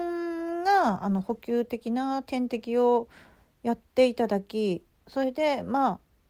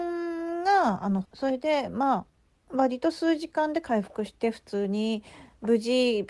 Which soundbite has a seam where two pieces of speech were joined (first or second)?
second